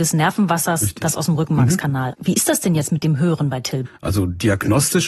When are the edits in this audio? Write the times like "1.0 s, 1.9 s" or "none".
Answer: 2.1 s, 3.8 s